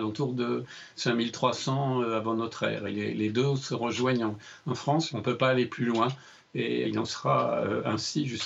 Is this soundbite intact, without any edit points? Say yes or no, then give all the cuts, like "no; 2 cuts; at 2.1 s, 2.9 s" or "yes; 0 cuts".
no; 2 cuts; at 5.1 s, 6.8 s